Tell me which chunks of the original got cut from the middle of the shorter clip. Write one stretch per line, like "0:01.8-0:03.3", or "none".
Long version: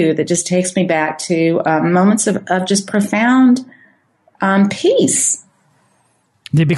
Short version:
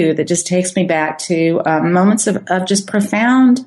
none